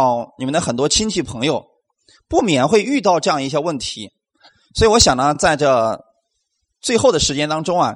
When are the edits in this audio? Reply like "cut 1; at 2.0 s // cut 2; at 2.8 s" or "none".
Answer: none